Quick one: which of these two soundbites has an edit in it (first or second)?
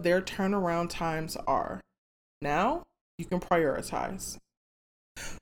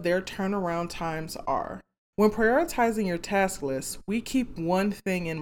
second